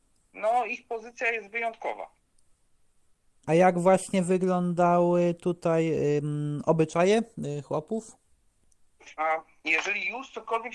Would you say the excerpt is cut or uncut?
cut